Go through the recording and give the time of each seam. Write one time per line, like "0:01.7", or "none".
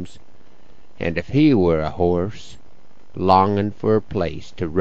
0:03.1